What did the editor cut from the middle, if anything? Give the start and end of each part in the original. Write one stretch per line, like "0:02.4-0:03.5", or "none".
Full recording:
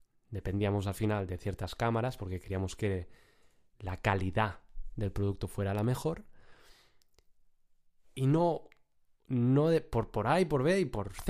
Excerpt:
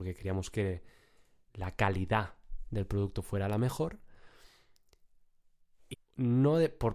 0:08.2-0:09.1